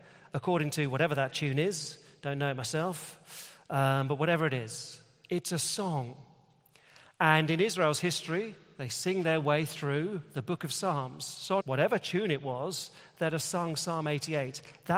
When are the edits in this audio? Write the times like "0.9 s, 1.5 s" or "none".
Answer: 11.6 s